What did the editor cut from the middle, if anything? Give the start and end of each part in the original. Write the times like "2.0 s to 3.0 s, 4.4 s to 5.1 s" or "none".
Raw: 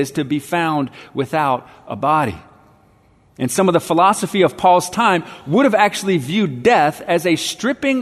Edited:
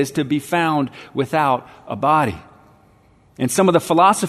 none